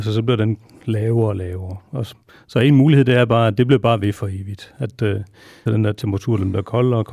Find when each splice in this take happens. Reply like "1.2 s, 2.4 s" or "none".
5.7 s